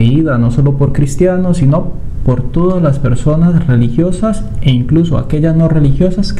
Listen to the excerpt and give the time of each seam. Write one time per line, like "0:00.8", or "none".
none